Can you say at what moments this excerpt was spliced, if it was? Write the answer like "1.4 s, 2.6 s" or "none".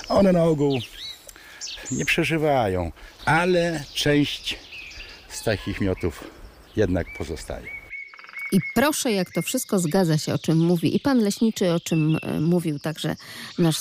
3.2 s